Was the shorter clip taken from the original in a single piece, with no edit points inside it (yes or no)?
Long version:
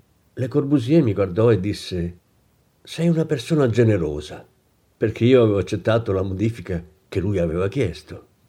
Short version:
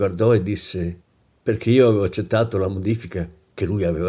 no